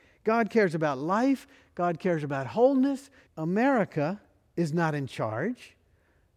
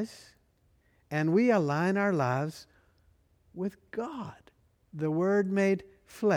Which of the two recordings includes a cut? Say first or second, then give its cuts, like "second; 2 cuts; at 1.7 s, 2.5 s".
first; 1 cut; at 3.3 s